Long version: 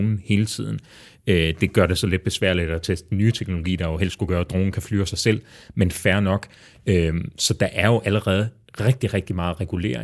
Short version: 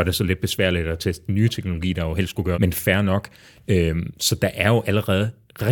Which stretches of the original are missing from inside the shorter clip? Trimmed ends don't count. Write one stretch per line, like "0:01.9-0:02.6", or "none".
0:04.4-0:05.7